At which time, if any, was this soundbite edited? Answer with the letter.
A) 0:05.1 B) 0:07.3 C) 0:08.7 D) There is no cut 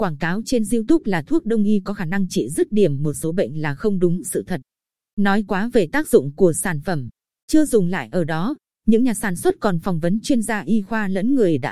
B